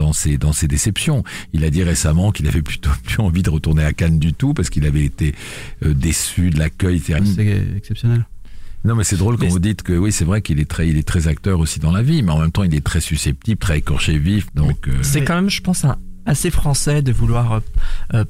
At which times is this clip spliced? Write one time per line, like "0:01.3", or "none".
0:07.2
0:14.5